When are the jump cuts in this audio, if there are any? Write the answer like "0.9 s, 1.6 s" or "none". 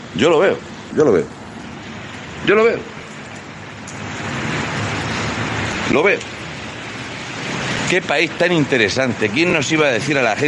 0.9 s